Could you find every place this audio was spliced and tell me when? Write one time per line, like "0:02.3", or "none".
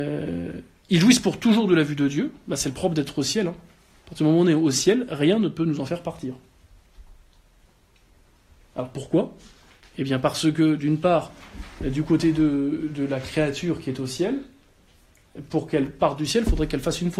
none